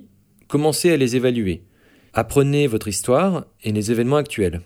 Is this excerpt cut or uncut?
cut